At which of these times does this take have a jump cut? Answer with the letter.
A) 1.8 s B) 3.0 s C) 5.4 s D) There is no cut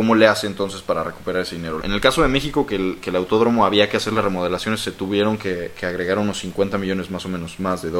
A